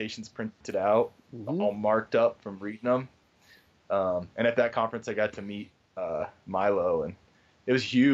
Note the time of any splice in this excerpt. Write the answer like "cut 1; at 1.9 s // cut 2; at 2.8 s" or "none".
none